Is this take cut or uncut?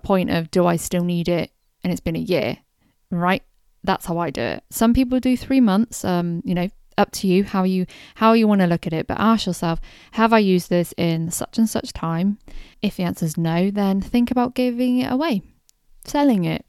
cut